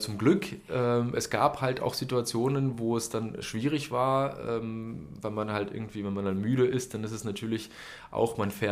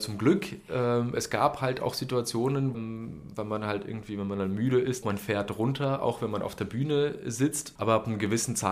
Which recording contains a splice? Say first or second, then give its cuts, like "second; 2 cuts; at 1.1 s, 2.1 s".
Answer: second; 3 cuts; at 2.7 s, 5.0 s, 7.8 s